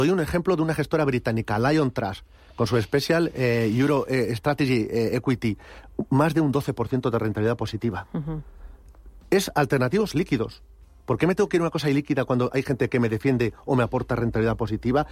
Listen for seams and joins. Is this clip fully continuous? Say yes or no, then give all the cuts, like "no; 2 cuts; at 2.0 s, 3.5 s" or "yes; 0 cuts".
yes; 0 cuts